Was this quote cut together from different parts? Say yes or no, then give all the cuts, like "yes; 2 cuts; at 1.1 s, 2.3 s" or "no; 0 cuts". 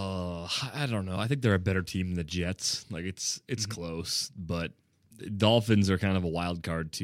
no; 0 cuts